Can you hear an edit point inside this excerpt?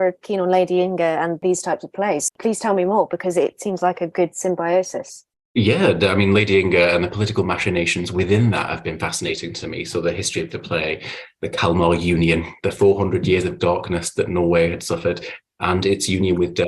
yes; 1 cut; at 2.3 s

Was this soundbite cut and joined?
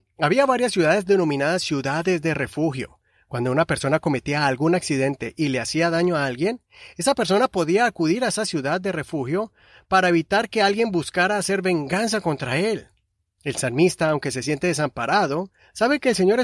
no; 0 cuts

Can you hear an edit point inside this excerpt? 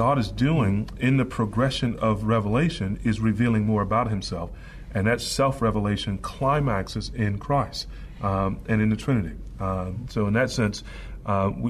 no; 0 cuts

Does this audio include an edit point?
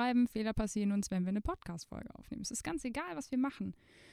no; 0 cuts

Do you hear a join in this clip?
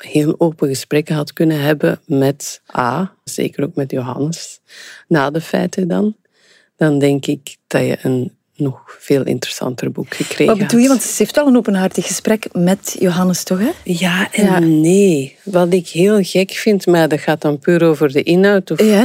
yes; 1 cut; at 3.3 s

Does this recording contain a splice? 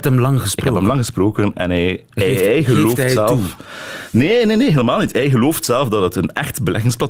no; 0 cuts

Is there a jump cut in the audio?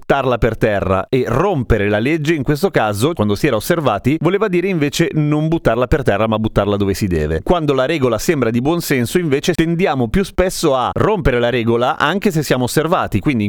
yes; 1 cut; at 3.2 s

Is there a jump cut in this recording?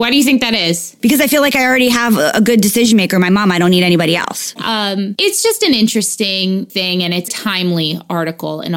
yes; 2 cuts; at 4.6 s, 7.3 s

